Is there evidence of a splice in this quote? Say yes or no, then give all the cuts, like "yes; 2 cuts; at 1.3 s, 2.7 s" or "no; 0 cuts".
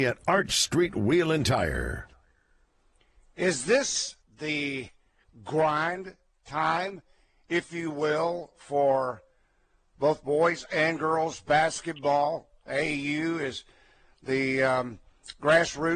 yes; 1 cut; at 4.2 s